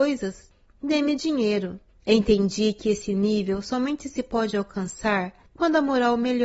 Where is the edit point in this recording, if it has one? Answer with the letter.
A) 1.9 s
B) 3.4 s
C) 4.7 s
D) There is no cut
A